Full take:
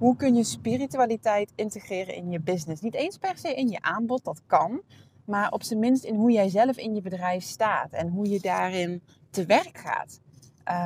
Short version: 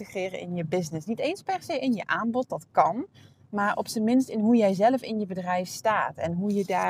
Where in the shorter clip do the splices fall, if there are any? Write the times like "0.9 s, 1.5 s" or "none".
none